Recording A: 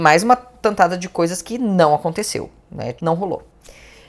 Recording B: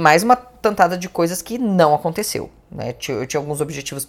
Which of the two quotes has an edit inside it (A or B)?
A